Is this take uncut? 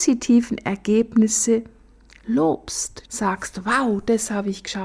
no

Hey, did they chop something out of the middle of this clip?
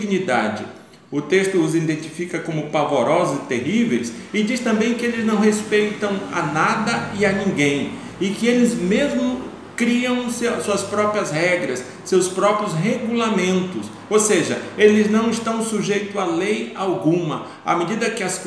no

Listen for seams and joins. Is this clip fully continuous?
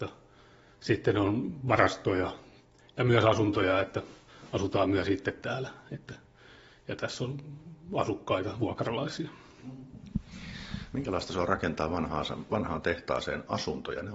yes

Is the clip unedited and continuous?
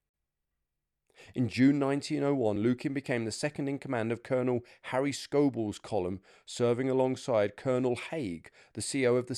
yes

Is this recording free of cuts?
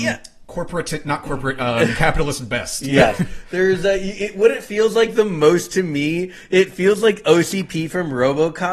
yes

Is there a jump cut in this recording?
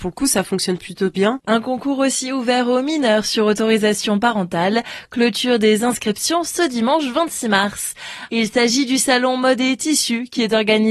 yes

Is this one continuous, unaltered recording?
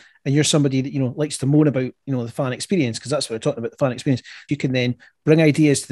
no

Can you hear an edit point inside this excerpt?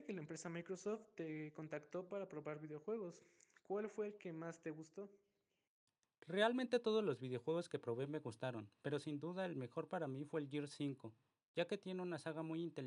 no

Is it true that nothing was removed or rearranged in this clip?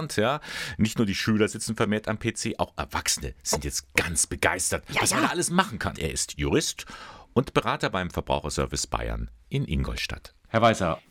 no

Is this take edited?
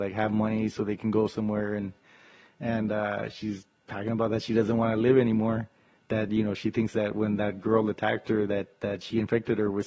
no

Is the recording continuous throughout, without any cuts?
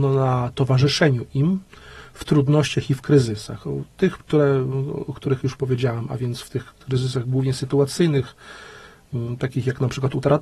yes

